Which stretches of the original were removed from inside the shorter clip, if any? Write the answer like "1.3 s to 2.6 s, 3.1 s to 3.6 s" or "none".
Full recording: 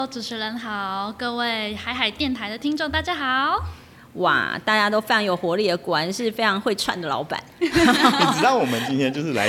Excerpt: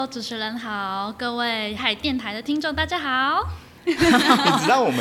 1.8 s to 1.9 s, 3.9 s to 7.5 s